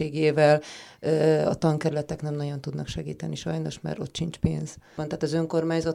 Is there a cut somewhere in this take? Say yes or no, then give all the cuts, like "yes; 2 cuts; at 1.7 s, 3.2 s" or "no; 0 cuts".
yes; 1 cut; at 5.0 s